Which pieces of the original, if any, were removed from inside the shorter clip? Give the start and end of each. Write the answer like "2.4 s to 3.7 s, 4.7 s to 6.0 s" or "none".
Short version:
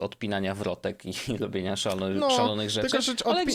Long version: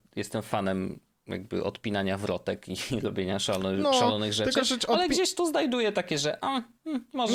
none